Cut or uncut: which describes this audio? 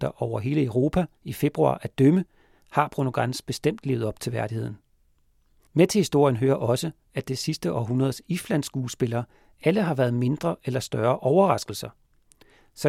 cut